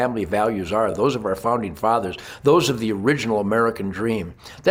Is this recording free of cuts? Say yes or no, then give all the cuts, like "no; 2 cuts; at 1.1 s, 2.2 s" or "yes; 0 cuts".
yes; 0 cuts